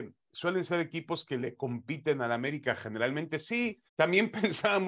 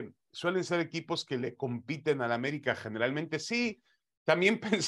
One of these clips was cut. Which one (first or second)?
first